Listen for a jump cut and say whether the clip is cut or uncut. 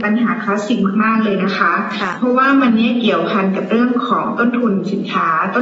uncut